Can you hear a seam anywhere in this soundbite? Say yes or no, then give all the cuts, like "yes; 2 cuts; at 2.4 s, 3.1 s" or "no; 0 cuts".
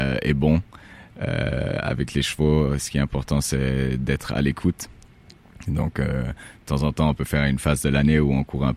no; 0 cuts